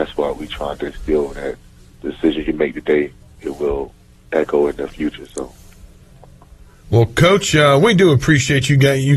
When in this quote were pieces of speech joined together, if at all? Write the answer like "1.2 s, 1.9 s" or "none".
none